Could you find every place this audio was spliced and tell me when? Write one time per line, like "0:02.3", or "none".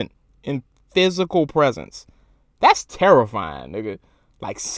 none